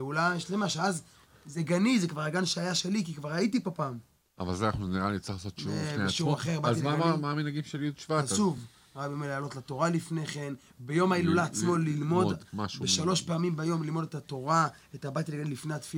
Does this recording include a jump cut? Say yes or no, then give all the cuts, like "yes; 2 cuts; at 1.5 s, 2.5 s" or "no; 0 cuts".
no; 0 cuts